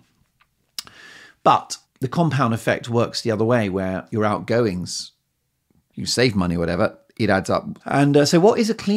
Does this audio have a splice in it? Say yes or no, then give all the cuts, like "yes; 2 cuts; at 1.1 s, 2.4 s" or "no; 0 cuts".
yes; 3 cuts; at 1.8 s, 5.9 s, 7.8 s